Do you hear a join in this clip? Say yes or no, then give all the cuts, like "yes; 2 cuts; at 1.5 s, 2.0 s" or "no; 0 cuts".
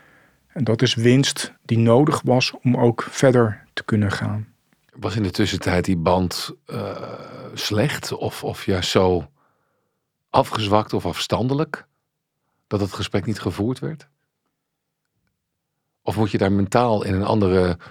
yes; 1 cut; at 1.6 s